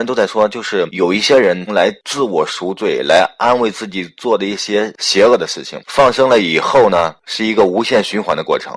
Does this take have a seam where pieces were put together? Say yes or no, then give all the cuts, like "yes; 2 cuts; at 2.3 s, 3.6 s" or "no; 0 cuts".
yes; 2 cuts; at 1.7 s, 5.8 s